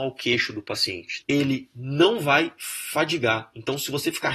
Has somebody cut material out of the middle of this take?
yes; 1 cut; at 1.2 s

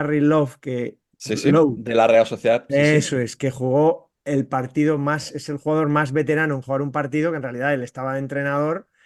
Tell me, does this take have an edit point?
no; 0 cuts

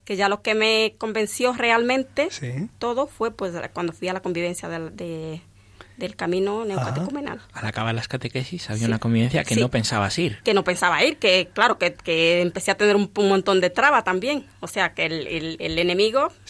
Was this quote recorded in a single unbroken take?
yes; 0 cuts

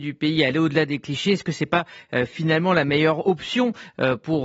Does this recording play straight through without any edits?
yes; 0 cuts

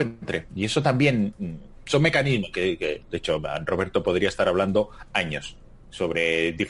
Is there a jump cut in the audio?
yes; 1 cut; at 3.0 s

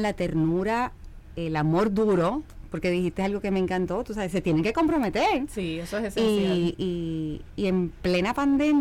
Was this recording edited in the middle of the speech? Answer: no; 0 cuts

